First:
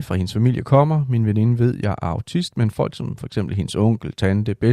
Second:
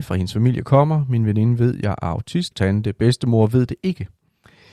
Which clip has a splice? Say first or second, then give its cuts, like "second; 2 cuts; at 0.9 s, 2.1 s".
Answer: second; 1 cut; at 2.5 s